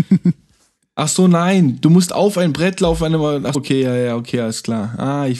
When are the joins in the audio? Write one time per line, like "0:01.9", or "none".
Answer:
0:03.5